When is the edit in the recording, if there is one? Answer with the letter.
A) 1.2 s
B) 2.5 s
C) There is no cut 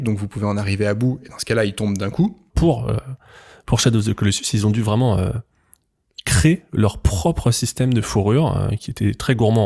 B